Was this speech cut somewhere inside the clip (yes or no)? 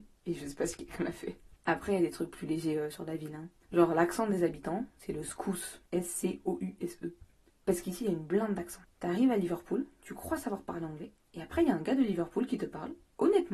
no